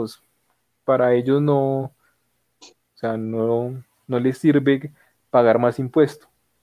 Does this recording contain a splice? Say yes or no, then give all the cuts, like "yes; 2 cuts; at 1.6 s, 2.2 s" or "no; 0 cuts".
no; 0 cuts